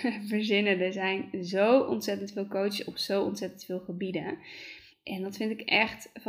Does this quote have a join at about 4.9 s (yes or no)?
yes